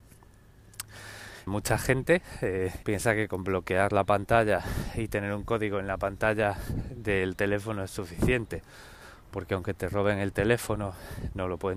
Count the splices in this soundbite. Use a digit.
2